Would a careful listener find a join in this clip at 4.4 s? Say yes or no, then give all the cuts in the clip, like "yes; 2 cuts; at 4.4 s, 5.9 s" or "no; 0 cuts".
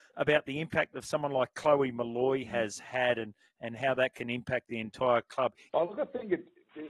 no; 1 cut; at 5.7 s